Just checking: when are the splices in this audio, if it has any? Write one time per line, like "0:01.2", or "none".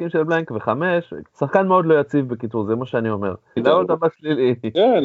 0:01.3
0:03.6